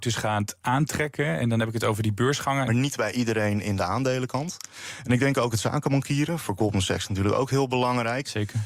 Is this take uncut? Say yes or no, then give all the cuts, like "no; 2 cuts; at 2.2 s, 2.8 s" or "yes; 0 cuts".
no; 1 cut; at 2.7 s